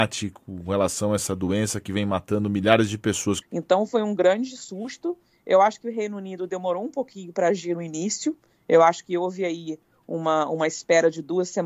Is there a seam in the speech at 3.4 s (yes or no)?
yes